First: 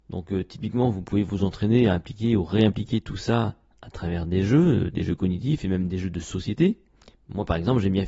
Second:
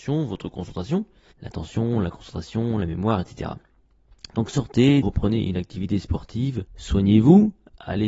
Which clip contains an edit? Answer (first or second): second